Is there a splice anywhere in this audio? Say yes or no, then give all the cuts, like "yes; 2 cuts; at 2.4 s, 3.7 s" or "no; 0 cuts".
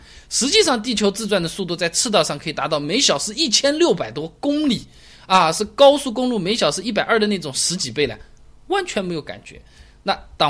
no; 0 cuts